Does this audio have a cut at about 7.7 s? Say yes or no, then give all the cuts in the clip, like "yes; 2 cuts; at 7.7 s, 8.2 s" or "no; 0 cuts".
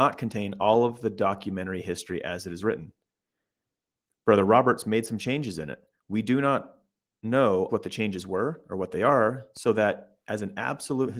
yes; 1 cut; at 7.7 s